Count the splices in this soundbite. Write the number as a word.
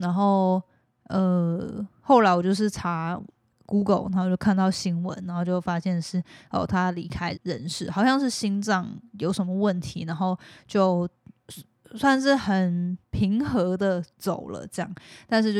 three